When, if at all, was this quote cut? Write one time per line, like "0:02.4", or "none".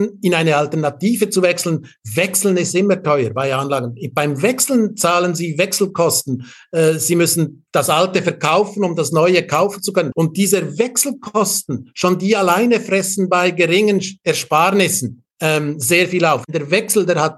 0:10.1
0:15.3